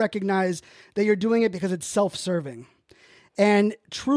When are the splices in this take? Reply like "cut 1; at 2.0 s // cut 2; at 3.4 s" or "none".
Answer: none

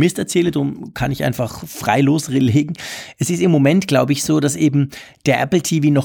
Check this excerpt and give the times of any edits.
none

